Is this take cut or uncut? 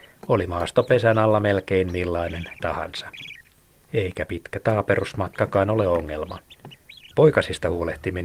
cut